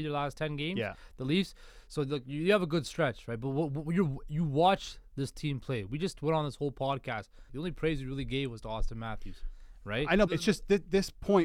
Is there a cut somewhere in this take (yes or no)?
yes